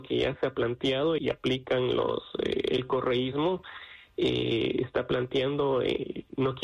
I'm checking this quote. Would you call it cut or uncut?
cut